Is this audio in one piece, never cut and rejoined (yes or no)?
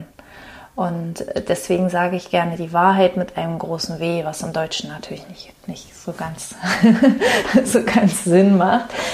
yes